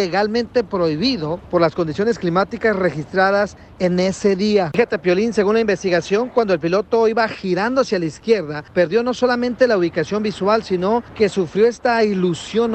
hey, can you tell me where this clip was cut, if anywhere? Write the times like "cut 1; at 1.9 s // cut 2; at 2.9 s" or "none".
none